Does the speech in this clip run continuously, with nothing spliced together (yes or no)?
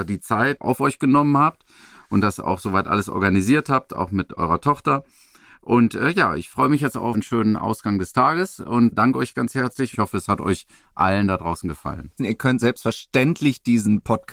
no